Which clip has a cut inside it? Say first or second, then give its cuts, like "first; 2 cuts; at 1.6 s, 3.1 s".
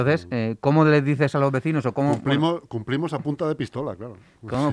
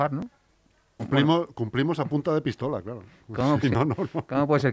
second; 2 cuts; at 1.0 s, 3.6 s